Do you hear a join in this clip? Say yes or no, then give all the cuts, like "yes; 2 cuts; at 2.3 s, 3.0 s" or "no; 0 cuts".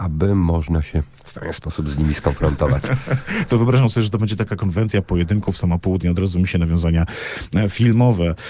no; 0 cuts